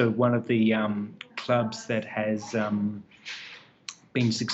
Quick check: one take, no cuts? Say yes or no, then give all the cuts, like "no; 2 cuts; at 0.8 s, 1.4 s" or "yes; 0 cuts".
no; 1 cut; at 1.3 s